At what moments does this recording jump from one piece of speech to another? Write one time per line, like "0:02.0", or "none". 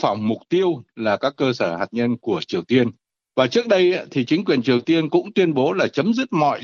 0:03.2